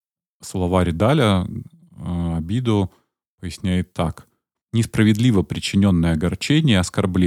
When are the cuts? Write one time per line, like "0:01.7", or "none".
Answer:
0:04.5